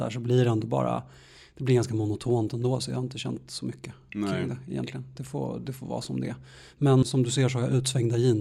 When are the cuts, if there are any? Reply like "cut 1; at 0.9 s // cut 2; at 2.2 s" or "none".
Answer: cut 1; at 7.0 s